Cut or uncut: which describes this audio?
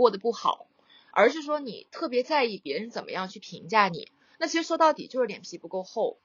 uncut